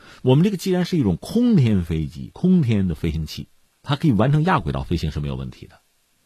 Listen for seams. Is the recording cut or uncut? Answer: uncut